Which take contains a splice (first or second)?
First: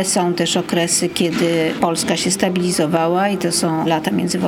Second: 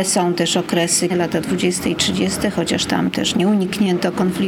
second